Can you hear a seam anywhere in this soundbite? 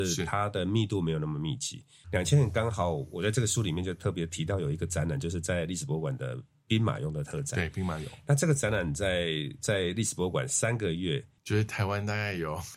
yes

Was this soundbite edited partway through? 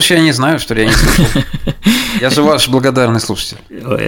no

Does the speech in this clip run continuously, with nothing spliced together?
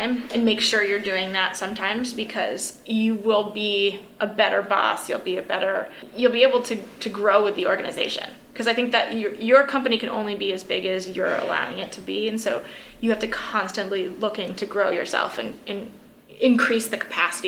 yes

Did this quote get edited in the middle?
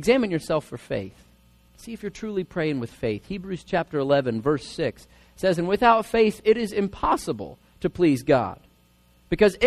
no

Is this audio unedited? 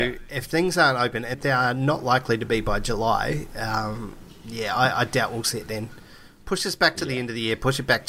no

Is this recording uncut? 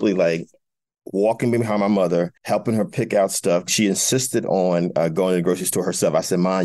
no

